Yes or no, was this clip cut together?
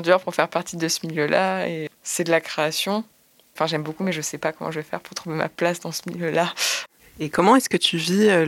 no